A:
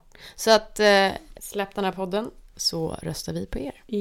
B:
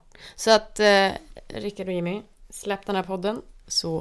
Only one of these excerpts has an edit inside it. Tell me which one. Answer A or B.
A